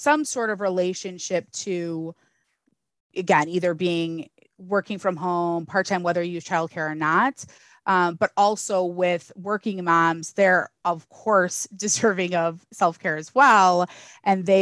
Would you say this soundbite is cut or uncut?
uncut